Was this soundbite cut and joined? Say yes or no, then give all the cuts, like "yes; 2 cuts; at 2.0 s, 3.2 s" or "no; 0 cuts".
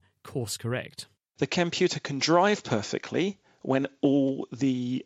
yes; 1 cut; at 1.4 s